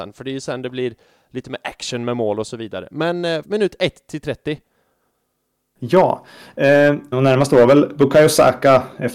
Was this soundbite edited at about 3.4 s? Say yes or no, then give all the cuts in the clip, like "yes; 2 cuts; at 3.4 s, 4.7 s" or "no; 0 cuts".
yes; 2 cuts; at 3.4 s, 7.1 s